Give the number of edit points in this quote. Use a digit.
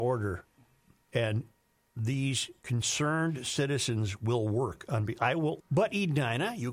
1